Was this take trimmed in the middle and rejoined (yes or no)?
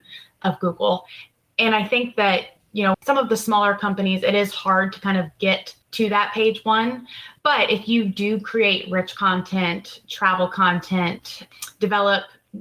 yes